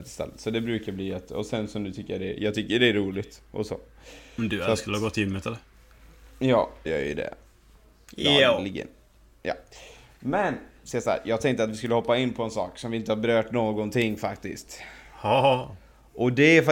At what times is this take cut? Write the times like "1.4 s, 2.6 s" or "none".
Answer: 6.9 s